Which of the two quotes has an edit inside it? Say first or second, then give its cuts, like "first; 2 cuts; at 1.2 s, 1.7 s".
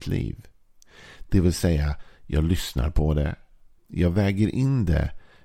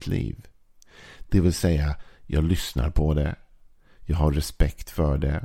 first; 1 cut; at 3.8 s